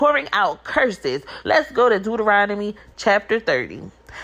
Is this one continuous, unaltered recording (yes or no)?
no